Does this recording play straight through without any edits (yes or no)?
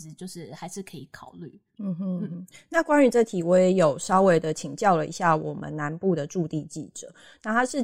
yes